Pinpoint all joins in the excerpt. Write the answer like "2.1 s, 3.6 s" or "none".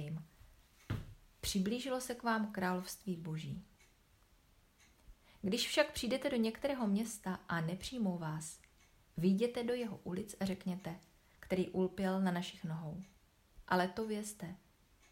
11.4 s